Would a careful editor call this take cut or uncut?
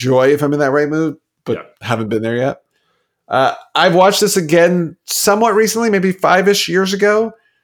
uncut